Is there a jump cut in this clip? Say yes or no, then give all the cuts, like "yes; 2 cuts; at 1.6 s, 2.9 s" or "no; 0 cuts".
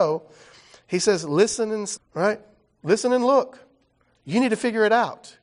yes; 1 cut; at 2.0 s